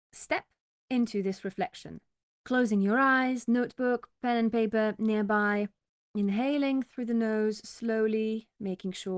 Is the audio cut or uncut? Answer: uncut